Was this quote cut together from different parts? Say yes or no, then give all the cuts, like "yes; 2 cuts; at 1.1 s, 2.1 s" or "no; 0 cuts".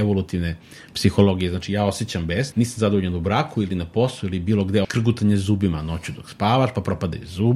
yes; 2 cuts; at 2.5 s, 4.8 s